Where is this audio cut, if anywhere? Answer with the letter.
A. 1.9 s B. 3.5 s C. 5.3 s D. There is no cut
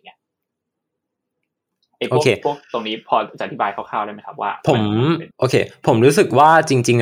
C